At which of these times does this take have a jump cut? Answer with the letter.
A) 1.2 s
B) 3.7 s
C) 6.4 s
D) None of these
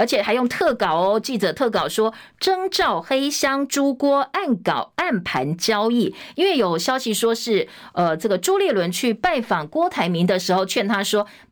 D